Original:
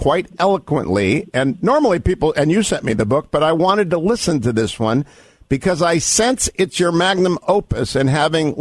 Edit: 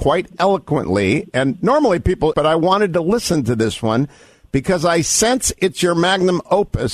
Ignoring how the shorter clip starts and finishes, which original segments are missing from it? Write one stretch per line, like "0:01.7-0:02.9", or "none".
0:02.3-0:03.3

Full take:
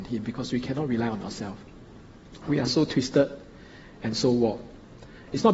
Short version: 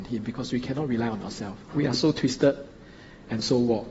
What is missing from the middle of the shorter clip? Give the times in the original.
0:01.6-0:02.4

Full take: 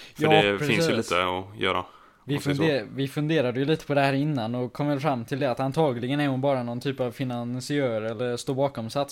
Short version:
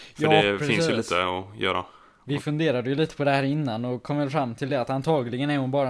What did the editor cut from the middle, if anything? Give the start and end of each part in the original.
0:02.4-0:03.1

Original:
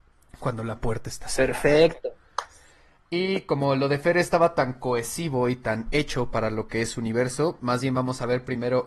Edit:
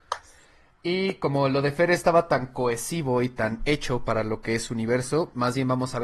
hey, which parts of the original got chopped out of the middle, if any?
none

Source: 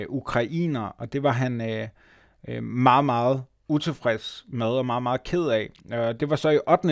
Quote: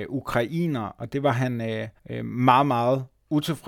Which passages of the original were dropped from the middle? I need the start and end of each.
0:02.0-0:02.4

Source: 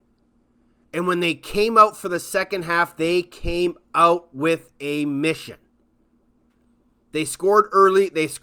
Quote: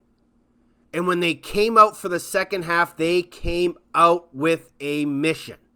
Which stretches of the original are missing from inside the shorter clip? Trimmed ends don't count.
none

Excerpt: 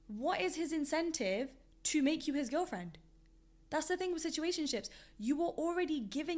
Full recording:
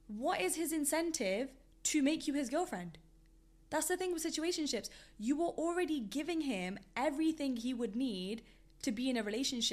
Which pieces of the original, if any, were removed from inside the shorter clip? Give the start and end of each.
none

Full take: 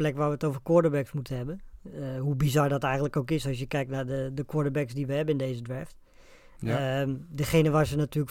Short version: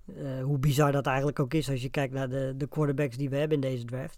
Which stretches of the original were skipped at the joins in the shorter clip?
none

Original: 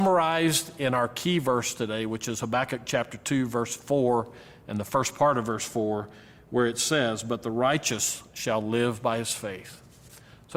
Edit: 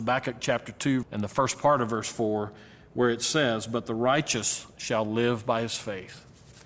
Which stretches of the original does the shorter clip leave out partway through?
0:03.5-0:04.6

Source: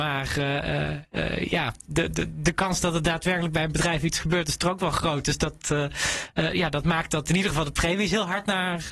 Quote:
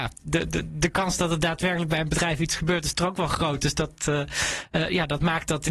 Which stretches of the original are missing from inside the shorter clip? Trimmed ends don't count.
none

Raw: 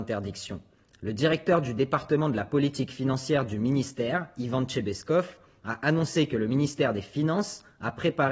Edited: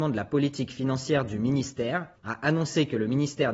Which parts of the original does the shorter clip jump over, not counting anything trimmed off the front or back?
0:04.4-0:05.6

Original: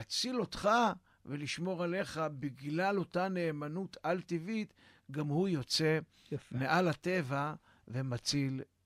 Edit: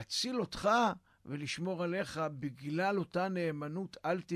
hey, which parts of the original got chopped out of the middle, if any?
none

